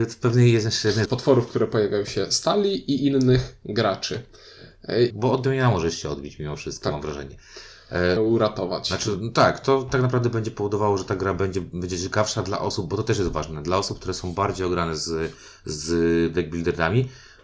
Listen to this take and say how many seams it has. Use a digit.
3